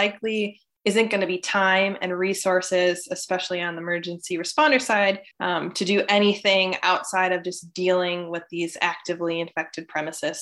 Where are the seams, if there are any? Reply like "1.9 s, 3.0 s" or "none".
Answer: 5.3 s